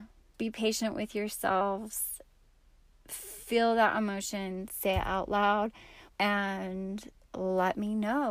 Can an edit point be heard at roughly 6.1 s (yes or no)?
yes